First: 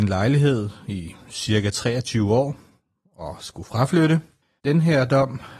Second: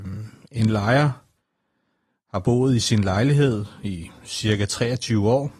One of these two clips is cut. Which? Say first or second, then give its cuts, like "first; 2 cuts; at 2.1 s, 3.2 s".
first; 1 cut; at 4.6 s